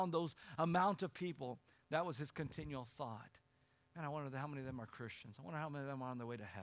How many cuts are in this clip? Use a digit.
0